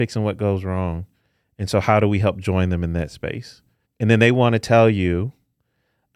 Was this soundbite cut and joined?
yes; 1 cut; at 3.8 s

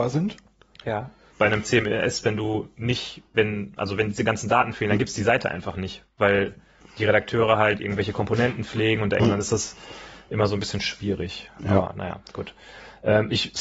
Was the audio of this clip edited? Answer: yes; 2 cuts; at 1.3 s, 9.2 s

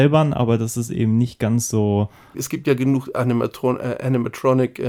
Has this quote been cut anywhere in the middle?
yes; 1 cut; at 2.3 s

